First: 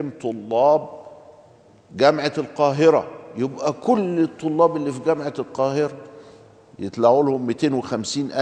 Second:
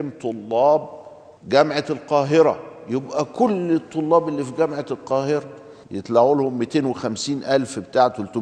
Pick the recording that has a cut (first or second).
second